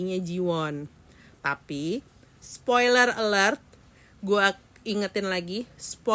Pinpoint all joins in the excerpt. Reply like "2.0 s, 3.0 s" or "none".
1.3 s